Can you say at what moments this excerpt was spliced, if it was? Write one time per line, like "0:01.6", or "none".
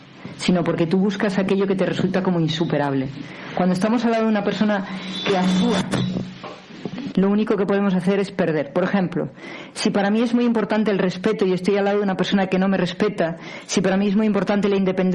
0:07.1